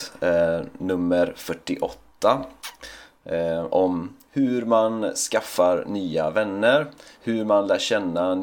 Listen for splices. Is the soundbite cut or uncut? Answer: uncut